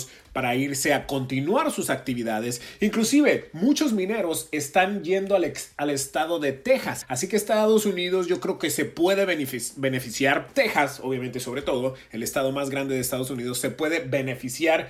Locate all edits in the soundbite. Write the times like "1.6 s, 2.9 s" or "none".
7.0 s